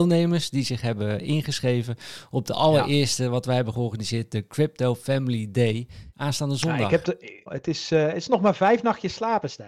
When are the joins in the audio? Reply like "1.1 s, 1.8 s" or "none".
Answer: 6.1 s, 7.5 s

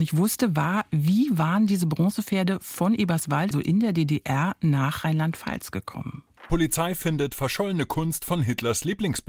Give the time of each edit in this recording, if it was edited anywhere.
3.5 s, 6.4 s

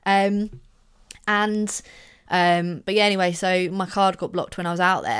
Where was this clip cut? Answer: 2.3 s

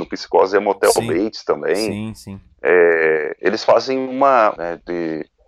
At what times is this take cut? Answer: 4.6 s

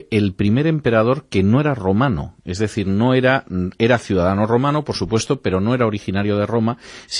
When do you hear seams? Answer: none

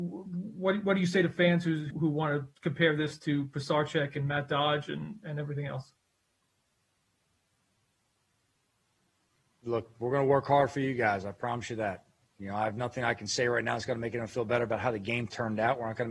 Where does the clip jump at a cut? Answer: 1.9 s

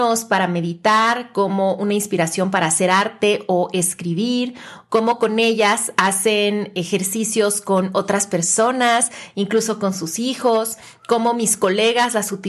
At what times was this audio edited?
none

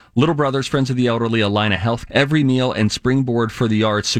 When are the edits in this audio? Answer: 2.1 s

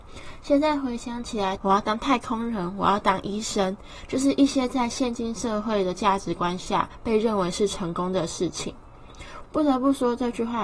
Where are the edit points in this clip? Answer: 1.6 s, 9.4 s

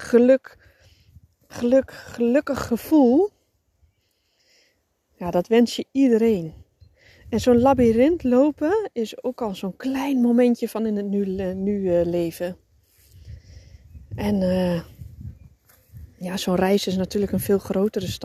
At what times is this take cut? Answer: none

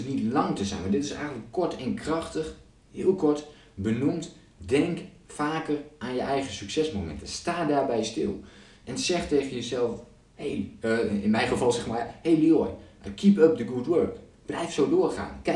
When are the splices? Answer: none

